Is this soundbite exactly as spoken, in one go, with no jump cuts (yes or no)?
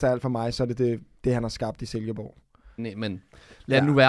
no